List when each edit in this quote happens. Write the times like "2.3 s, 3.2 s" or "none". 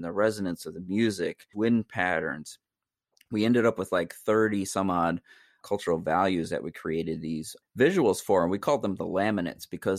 1.5 s

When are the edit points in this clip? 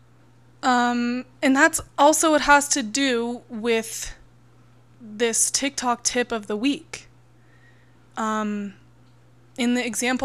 none

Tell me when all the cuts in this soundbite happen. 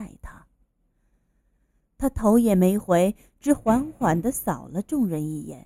none

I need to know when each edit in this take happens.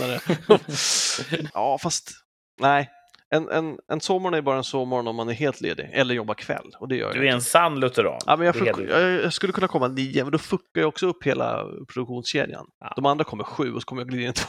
1.5 s

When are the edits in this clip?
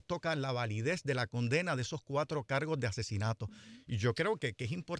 none

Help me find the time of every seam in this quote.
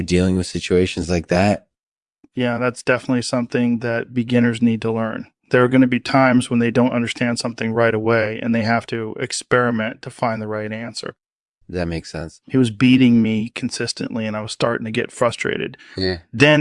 12.4 s

